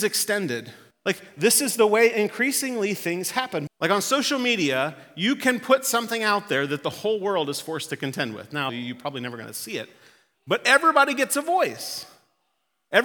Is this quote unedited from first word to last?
no; 3 cuts; at 0.9 s, 3.7 s, 8.7 s

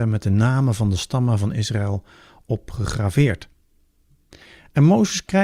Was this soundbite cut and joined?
no; 0 cuts

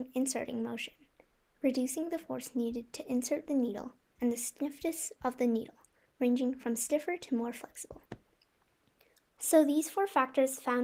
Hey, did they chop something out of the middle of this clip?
yes; 1 cut; at 4.1 s

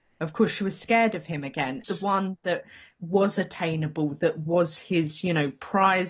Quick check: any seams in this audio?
yes; 1 cut; at 1.8 s

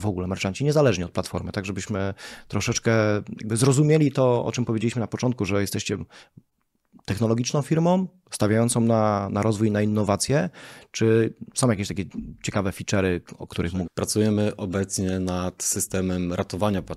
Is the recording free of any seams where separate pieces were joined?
no; 1 cut; at 13.9 s

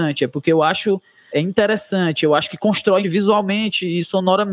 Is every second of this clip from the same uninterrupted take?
no; 2 cuts; at 1.3 s, 3.0 s

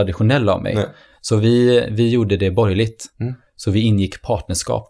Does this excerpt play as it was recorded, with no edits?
yes; 0 cuts

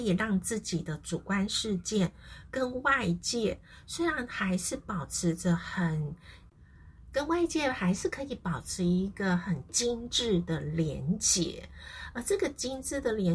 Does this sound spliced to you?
no; 0 cuts

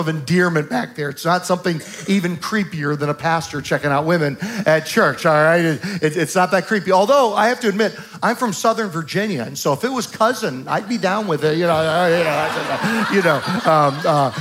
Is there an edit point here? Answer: no; 0 cuts

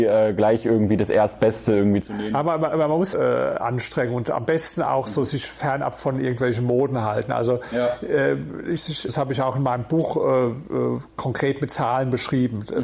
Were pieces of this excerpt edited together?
yes; 2 cuts; at 3.1 s, 9.1 s

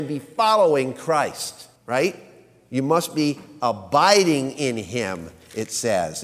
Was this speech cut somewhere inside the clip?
yes; 1 cut; at 1.8 s

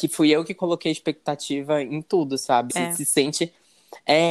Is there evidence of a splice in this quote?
yes; 1 cut; at 2.7 s

